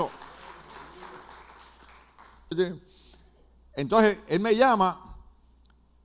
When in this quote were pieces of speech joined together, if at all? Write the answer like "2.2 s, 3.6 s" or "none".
2.5 s